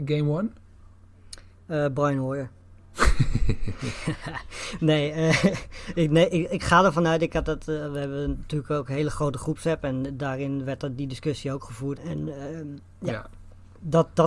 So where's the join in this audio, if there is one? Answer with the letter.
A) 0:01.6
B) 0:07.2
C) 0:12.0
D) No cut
C